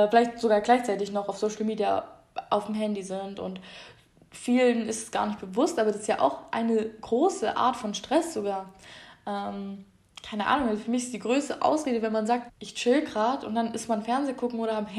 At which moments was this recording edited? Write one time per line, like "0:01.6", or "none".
0:12.5